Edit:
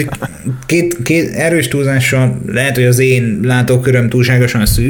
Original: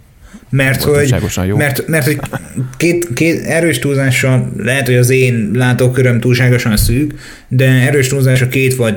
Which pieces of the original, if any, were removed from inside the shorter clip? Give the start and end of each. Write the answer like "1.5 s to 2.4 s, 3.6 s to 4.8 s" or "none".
none